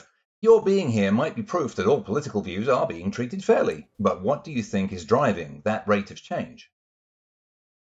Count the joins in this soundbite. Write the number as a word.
one